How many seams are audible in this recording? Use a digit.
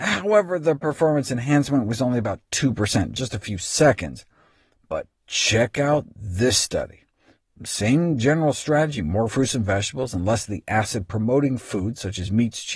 0